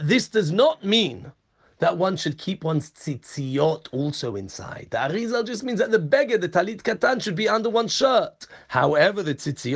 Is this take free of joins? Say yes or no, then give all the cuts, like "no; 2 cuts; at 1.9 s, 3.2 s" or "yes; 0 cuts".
yes; 0 cuts